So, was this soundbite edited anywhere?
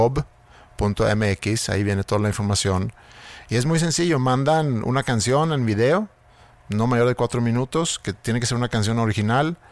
no; 0 cuts

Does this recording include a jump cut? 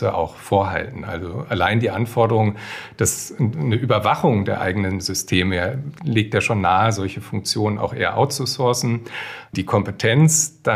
yes; 2 cuts; at 6.0 s, 9.5 s

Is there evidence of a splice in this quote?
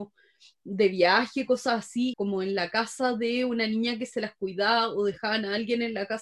yes; 1 cut; at 2.1 s

